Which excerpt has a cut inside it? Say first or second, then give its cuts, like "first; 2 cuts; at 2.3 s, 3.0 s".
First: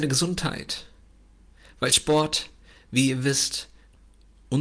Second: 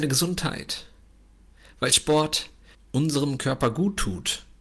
second; 1 cut; at 2.7 s